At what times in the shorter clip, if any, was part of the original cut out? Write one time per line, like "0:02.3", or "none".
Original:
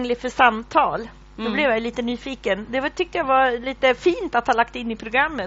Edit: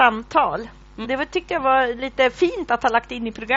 0:01.0